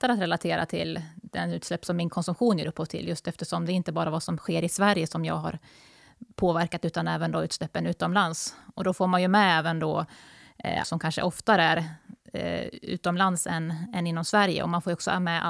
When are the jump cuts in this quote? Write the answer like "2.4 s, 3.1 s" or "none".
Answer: 10.8 s